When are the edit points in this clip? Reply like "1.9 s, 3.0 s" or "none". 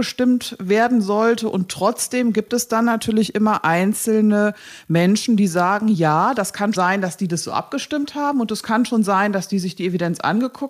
6.8 s

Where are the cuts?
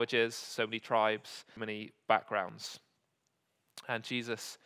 1.6 s

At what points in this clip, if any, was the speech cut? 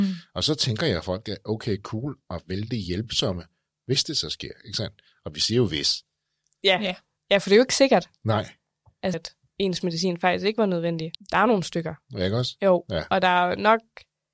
9.1 s, 11.1 s

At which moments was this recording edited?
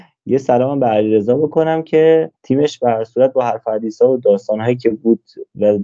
2.4 s

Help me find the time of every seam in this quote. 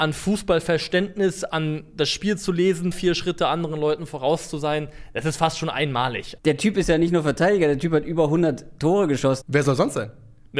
2.9 s, 6.4 s, 9.4 s

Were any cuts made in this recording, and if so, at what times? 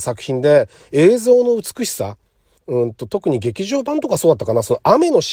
2.6 s

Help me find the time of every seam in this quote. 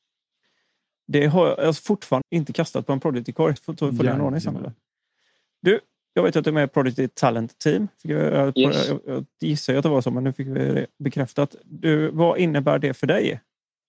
2.2 s, 3.6 s

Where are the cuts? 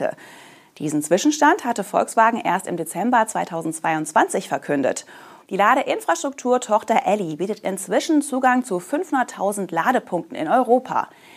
5.4 s

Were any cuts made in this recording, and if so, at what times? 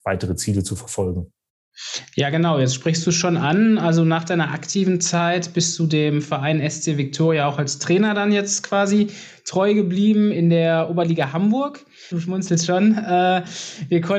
12.1 s

